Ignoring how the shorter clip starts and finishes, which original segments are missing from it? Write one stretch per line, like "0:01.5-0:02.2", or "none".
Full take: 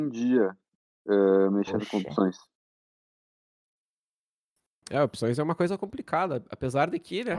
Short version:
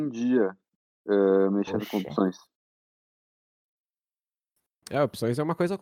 none